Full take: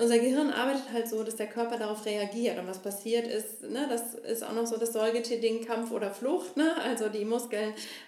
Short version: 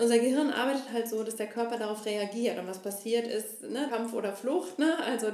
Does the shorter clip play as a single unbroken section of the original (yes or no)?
no